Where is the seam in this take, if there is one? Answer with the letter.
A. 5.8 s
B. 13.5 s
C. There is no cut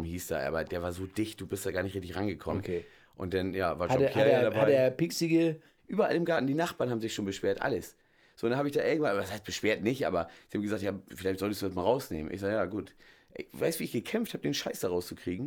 A